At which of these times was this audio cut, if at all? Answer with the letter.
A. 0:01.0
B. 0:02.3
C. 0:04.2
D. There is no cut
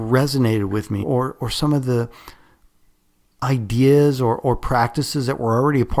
A